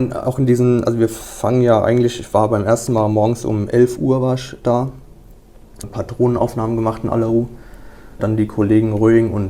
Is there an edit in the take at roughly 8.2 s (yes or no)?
yes